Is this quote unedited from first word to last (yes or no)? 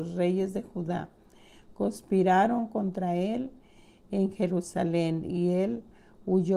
yes